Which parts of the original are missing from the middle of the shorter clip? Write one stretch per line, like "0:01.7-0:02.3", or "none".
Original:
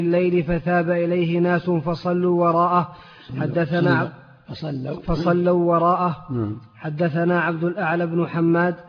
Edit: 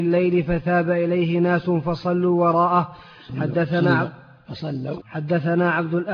0:05.0-0:06.7